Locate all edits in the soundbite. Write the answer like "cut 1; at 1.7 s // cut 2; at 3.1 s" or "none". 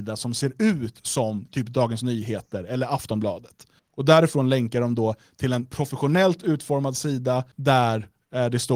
cut 1; at 3.8 s // cut 2; at 7.5 s